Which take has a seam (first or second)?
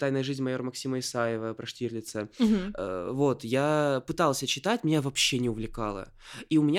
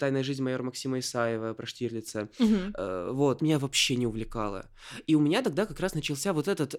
second